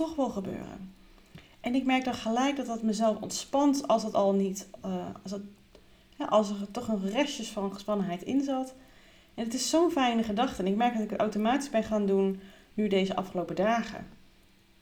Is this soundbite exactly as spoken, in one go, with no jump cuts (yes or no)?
yes